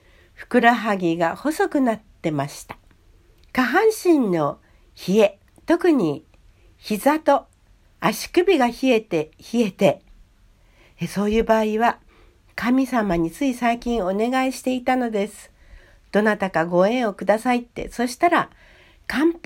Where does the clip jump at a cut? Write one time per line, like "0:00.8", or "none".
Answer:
0:03.4

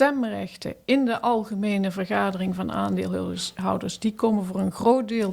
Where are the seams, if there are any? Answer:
none

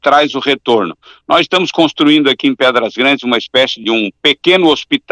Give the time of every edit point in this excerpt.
0:03.8

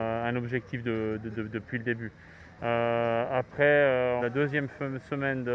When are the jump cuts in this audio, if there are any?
0:02.6
0:04.2

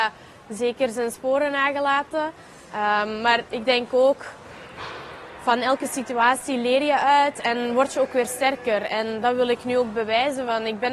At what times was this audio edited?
none

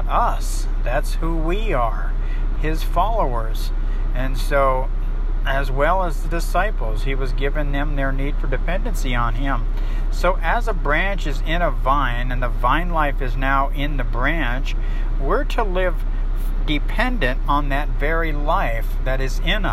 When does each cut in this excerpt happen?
0:02.5

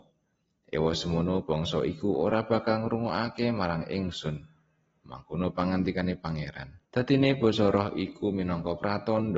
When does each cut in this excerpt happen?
0:06.8

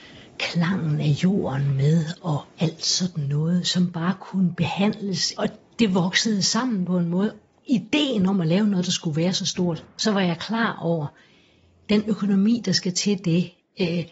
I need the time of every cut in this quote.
none

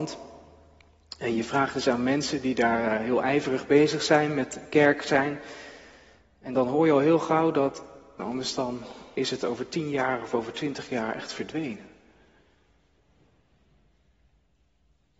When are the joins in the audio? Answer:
0:08.2

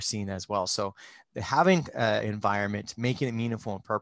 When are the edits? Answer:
0:02.2

